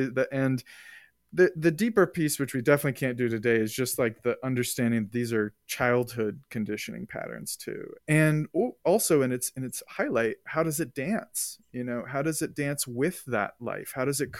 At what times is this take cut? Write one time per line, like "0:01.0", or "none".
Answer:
0:08.0